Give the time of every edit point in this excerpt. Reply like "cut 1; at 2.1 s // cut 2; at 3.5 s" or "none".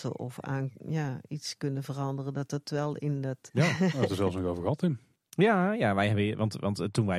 cut 1; at 3.5 s